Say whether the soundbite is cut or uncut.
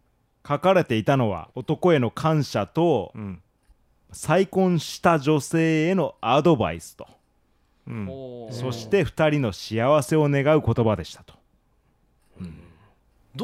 cut